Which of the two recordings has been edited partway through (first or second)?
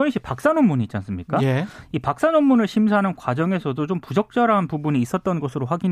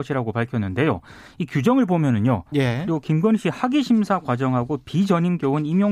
second